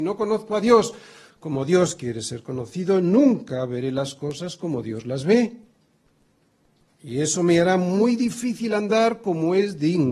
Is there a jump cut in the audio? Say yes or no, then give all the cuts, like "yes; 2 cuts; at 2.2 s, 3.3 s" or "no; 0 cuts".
no; 0 cuts